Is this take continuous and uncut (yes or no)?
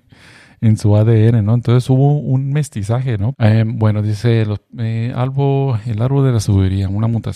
no